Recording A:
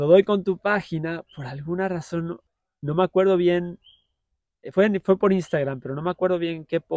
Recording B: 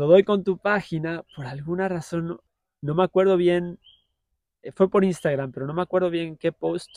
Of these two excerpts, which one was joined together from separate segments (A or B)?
B